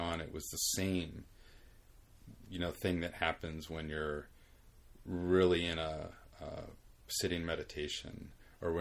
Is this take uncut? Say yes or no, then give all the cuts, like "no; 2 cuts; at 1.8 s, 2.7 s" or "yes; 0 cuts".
yes; 0 cuts